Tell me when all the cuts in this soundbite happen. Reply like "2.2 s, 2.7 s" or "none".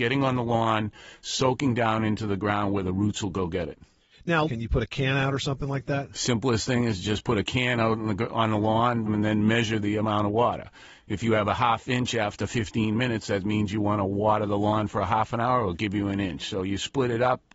4.5 s, 9.1 s